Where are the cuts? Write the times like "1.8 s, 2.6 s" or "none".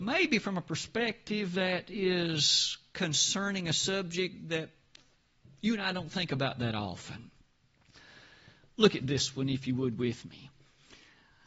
none